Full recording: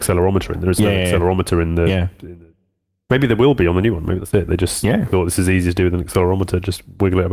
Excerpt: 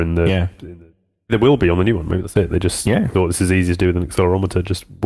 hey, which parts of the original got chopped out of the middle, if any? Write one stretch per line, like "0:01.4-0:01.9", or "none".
0:02.9-0:03.3

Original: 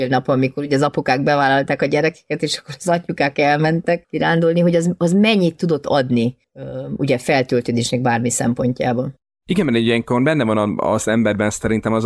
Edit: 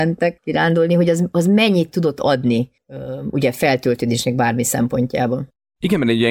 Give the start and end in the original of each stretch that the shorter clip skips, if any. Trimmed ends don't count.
none

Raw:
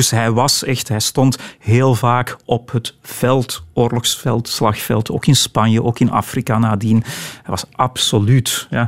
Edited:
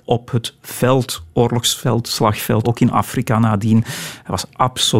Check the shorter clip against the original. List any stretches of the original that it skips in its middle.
0:05.0-0:05.8

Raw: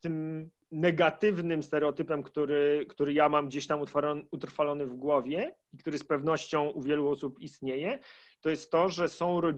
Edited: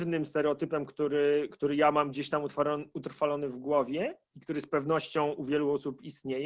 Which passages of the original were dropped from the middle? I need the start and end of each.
none

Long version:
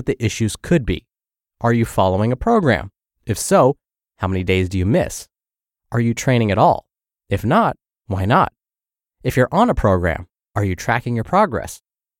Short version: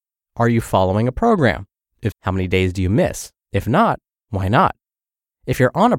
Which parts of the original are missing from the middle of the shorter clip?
0:03.3-0:04.1
0:05.4-0:07.2

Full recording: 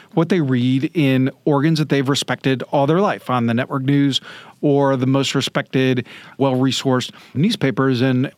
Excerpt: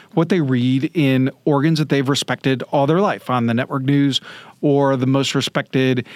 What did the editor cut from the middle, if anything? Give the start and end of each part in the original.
none

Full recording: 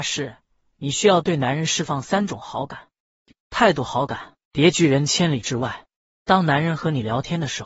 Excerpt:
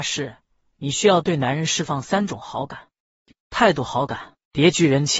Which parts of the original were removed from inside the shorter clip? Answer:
none

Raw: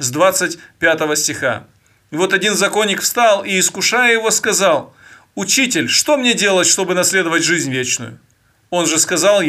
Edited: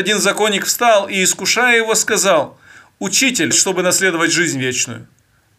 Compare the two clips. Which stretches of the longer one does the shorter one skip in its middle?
0:05.9-0:06.6

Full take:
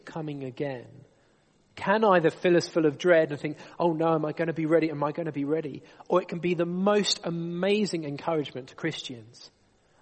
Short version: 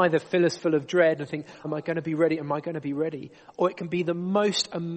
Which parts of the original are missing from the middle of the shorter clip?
0:03.8-0:04.2

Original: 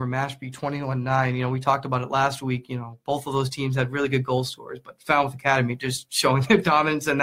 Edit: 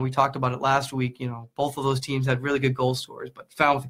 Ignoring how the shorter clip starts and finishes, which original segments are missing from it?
none

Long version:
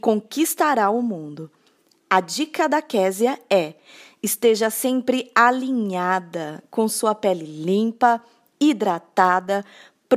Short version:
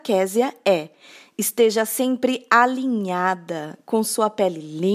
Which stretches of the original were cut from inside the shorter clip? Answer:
none

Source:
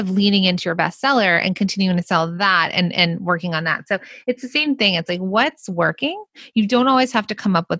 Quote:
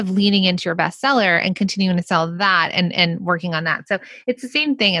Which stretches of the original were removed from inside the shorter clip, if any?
none

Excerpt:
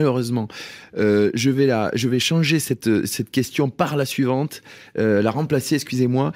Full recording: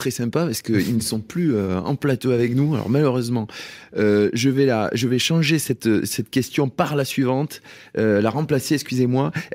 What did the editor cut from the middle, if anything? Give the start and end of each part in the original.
none

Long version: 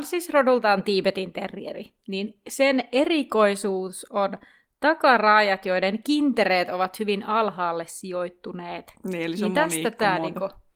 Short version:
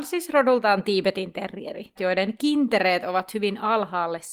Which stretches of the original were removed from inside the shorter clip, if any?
0:02.0-0:05.6

